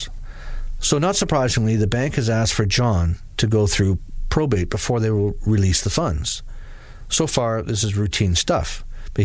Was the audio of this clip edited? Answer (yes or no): no